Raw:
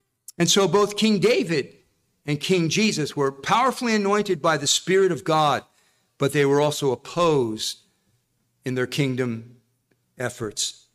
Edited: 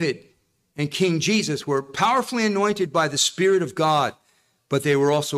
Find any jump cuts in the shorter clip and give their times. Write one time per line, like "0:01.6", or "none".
none